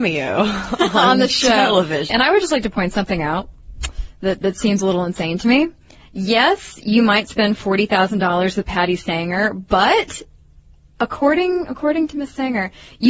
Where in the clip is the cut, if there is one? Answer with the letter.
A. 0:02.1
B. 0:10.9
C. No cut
A